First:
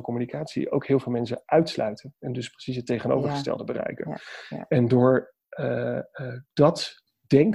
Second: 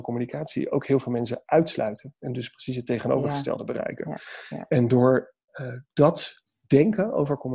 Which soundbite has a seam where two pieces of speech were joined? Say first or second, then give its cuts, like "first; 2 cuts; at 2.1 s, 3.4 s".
second; 1 cut; at 5.5 s